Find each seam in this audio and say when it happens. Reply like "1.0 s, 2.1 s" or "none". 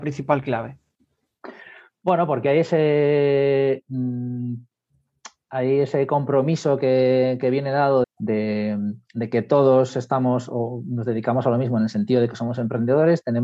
8.0 s